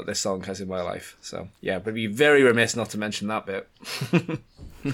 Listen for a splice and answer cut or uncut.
uncut